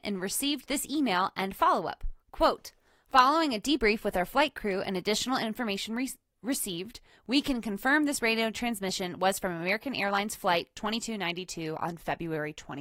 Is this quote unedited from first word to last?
yes; 0 cuts

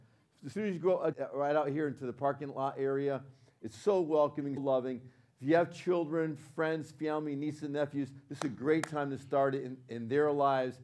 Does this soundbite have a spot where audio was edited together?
yes; 2 cuts; at 1.1 s, 4.6 s

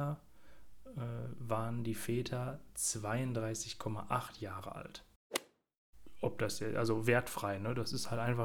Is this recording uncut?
yes; 0 cuts

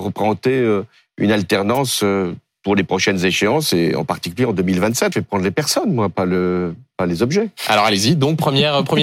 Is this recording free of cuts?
no; 1 cut; at 5.1 s

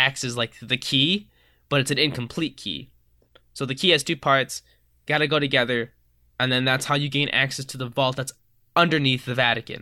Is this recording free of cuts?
yes; 0 cuts

